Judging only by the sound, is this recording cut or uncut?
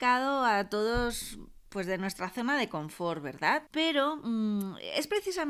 cut